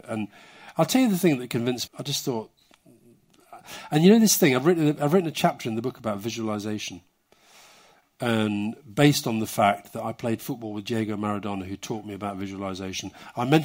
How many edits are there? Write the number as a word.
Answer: one